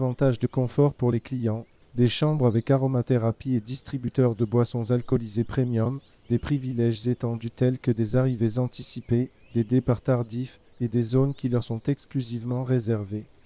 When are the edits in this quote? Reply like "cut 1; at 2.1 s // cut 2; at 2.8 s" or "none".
cut 1; at 1.8 s

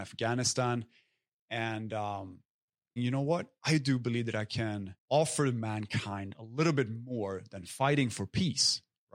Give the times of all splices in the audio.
cut 1; at 3.0 s // cut 2; at 5.0 s

